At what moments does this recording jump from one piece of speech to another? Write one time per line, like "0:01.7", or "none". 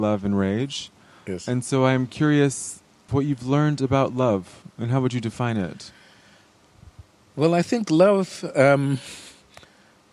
0:03.1